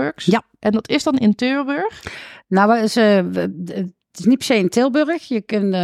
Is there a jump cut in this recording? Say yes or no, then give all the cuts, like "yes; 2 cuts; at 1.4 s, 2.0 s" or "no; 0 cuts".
no; 0 cuts